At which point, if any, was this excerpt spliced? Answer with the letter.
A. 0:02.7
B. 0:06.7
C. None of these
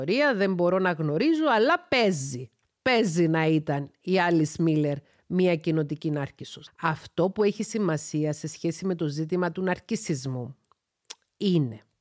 B